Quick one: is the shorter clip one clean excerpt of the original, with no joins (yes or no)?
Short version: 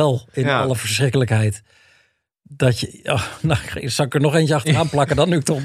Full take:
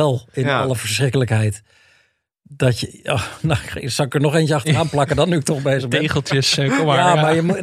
yes